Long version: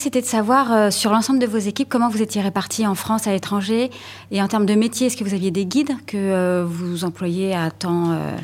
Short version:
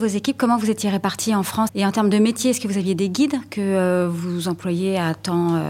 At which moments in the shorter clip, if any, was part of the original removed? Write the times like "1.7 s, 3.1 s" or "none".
1.7 s